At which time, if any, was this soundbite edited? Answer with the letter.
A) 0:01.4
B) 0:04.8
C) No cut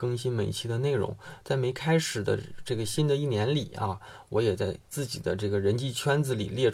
B